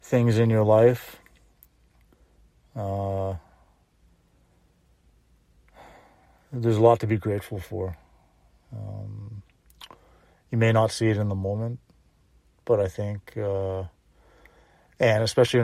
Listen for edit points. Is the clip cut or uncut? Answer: uncut